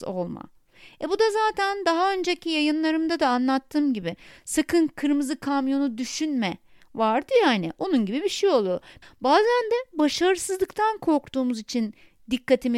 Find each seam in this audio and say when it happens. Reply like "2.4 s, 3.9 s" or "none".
9.0 s